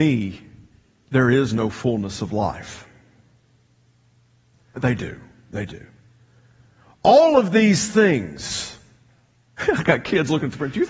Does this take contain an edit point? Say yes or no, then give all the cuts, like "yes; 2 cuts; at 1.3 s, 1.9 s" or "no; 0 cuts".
yes; 1 cut; at 4.8 s